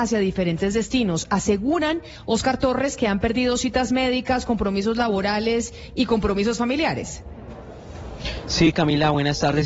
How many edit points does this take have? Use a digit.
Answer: 0